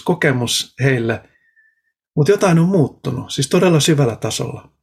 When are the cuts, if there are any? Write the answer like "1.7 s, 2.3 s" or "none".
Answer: none